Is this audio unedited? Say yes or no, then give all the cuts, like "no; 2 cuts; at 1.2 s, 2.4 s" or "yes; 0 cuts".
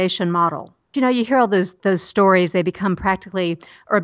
no; 1 cut; at 0.9 s